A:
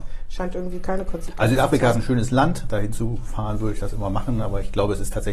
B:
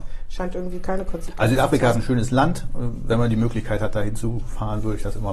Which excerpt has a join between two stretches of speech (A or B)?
A